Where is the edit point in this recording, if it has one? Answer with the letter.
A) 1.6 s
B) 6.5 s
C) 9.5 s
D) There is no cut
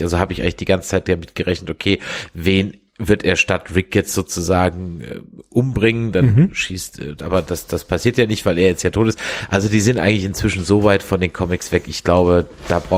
D